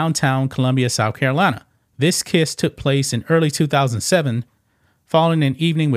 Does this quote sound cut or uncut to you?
cut